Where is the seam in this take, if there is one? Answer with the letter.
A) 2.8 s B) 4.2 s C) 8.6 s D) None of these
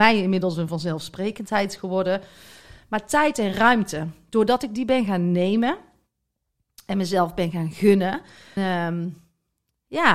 C